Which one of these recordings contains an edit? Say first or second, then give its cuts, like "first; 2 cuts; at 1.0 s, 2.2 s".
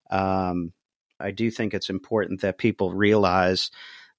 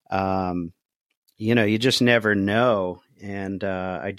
first; 1 cut; at 1.2 s